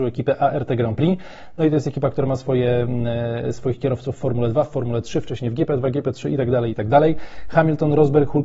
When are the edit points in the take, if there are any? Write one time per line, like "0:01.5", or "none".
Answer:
none